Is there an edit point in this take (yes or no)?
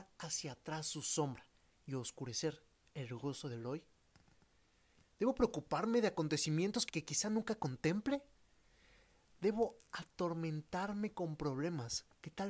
yes